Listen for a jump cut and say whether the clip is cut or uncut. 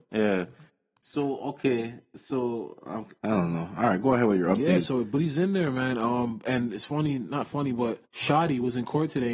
cut